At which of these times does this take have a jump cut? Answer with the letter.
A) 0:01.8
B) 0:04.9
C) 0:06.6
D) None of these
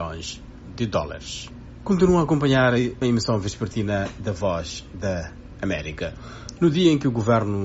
C